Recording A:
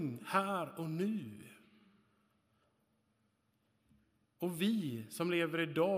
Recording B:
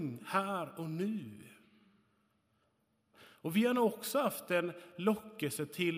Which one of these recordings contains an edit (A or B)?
B